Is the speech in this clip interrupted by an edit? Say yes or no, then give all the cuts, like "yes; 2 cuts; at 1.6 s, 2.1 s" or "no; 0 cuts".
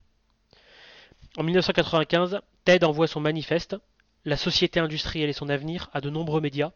no; 0 cuts